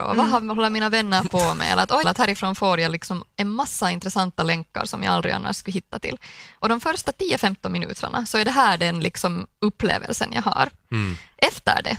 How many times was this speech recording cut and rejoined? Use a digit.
1